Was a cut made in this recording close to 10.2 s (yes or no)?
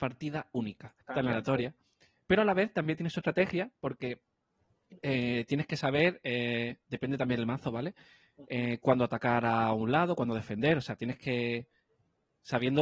no